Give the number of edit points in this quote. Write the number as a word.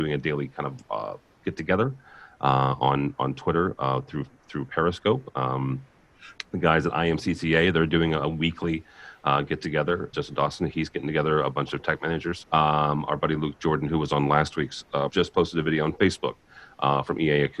three